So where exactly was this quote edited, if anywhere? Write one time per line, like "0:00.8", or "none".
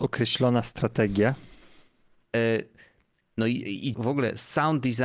0:02.2
0:03.9